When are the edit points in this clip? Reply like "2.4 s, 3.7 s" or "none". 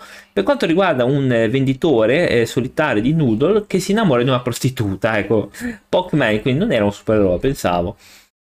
5.5 s